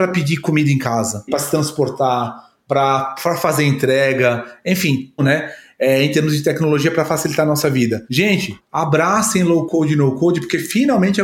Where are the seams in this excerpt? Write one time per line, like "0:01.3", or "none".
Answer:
0:05.2